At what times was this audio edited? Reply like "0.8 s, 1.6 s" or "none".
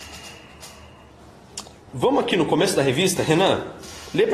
1.9 s

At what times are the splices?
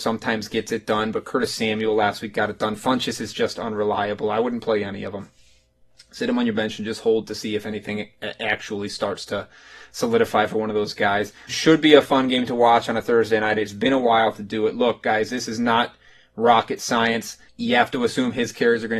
11.5 s, 17.5 s

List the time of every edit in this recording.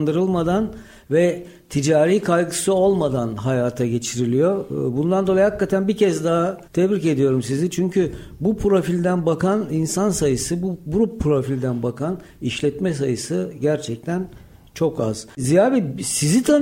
6.6 s

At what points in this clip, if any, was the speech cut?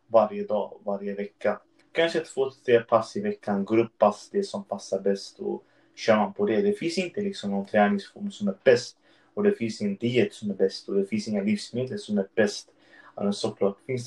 1.8 s

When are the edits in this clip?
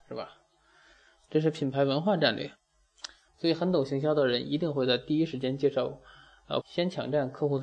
3.3 s, 6.6 s

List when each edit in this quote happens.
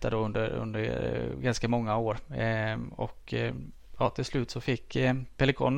none

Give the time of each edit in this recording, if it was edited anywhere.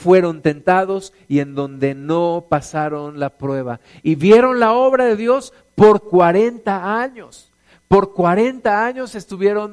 none

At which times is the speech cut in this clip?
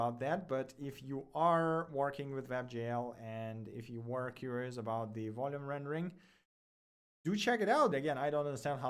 7.9 s

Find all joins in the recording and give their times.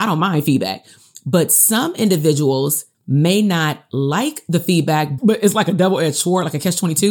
2.9 s, 5.2 s

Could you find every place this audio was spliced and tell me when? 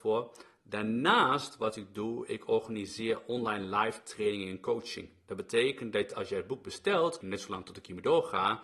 7.2 s

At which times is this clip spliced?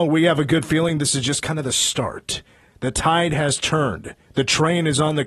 none

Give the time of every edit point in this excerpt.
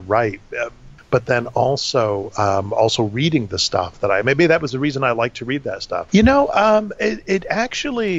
1.0 s, 6.1 s

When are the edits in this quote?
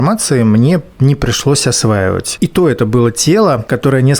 2.4 s

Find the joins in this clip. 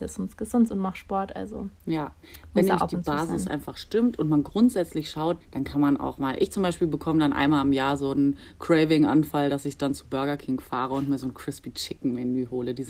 5.4 s

